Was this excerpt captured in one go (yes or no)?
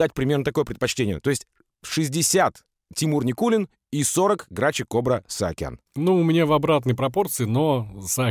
no